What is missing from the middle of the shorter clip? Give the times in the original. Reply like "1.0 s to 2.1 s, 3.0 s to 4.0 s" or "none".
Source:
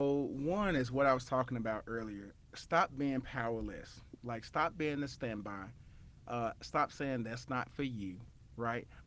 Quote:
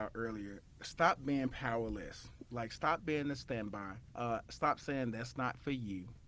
5.8 s to 6.2 s